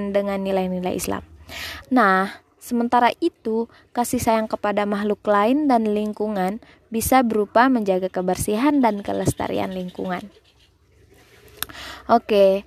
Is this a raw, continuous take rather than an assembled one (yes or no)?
no